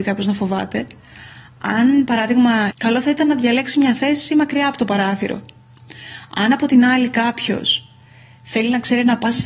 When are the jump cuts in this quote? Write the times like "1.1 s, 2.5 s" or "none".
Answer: 2.7 s